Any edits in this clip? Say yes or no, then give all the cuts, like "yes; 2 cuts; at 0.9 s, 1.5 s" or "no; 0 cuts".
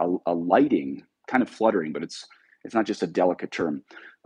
no; 0 cuts